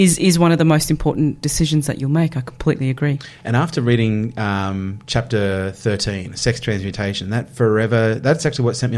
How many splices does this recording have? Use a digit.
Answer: 0